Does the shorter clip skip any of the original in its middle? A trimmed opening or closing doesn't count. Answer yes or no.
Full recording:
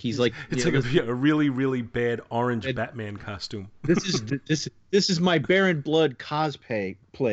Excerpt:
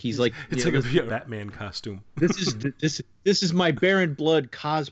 yes